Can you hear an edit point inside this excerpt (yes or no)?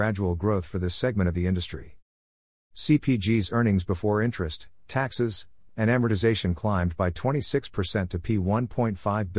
yes